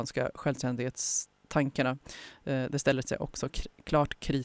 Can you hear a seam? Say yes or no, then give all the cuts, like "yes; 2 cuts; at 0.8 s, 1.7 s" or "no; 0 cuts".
no; 0 cuts